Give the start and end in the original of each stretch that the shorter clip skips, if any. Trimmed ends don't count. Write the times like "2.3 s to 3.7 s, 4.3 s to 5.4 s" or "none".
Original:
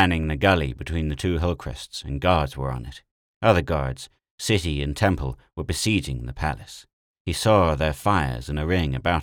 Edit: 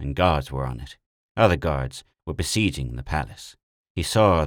4.2 s to 5.5 s